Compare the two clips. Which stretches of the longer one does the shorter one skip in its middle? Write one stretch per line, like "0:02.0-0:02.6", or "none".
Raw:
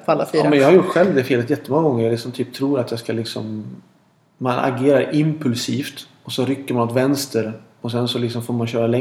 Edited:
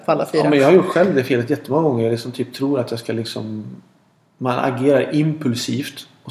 none